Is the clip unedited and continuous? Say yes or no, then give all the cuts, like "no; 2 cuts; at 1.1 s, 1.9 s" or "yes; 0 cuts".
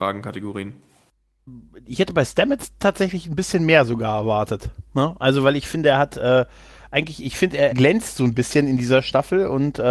no; 2 cuts; at 4.9 s, 7.7 s